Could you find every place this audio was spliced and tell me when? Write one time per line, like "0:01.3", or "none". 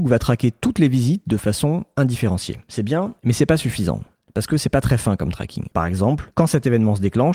0:05.7